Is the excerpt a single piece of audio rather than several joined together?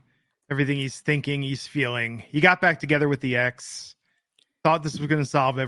yes; 0 cuts

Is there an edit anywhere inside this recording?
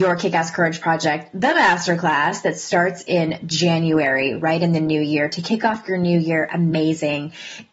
no; 0 cuts

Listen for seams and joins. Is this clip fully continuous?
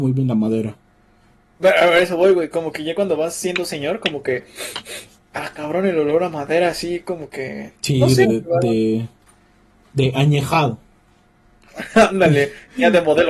no; 1 cut; at 8.2 s

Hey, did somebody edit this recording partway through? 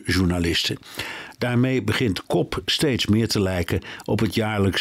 no; 0 cuts

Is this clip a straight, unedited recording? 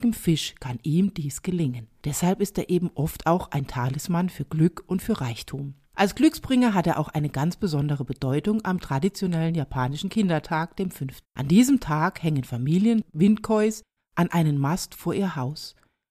no; 3 cuts; at 5.8 s, 11.2 s, 14.0 s

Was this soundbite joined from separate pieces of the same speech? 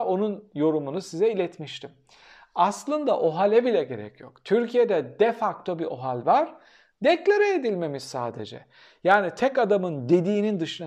no; 0 cuts

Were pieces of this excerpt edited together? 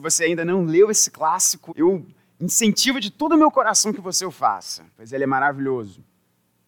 yes; 2 cuts; at 1.7 s, 4.9 s

